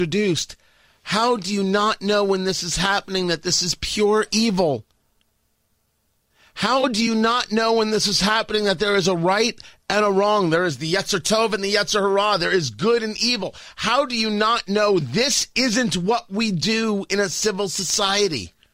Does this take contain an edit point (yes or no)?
no